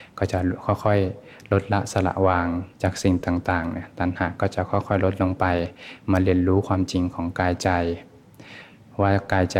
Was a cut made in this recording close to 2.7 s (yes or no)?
yes